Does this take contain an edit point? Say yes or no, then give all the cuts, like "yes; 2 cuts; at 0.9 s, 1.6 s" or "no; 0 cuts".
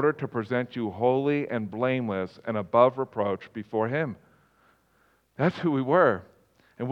no; 0 cuts